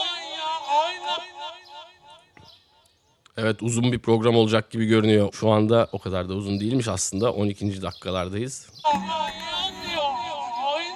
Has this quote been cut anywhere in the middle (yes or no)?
yes